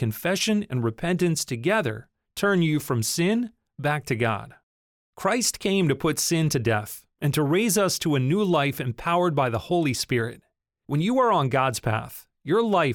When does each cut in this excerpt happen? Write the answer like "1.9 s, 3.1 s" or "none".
none